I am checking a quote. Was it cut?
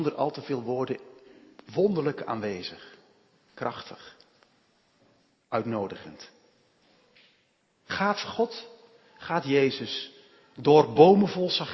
no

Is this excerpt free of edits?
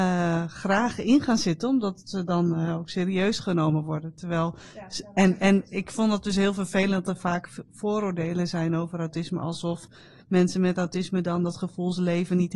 yes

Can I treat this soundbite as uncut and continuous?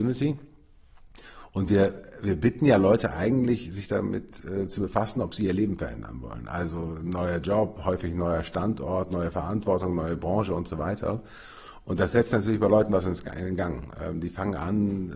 yes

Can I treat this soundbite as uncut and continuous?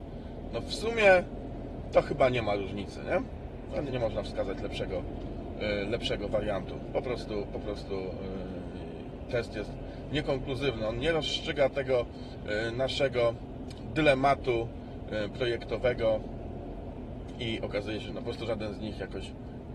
no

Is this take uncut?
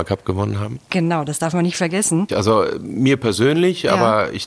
no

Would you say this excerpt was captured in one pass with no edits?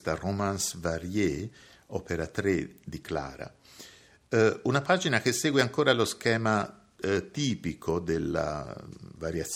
yes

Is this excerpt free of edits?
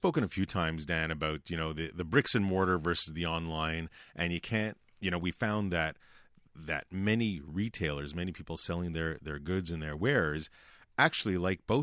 yes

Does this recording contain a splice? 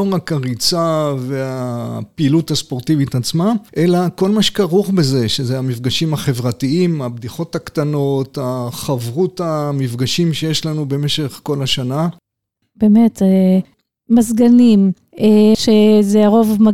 yes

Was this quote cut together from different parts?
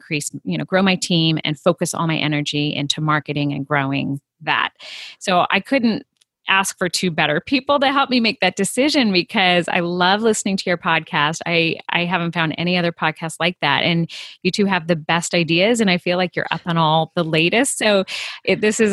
no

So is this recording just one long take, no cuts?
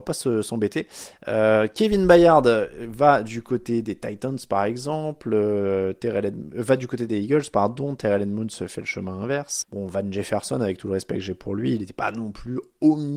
no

